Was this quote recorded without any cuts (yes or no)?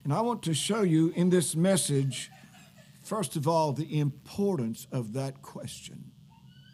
yes